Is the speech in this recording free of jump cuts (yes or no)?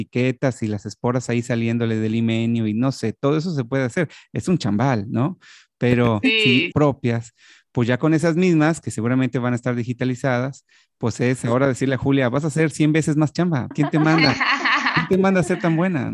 no